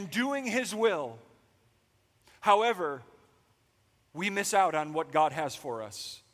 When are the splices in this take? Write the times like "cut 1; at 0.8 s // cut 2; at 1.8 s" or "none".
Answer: cut 1; at 4.0 s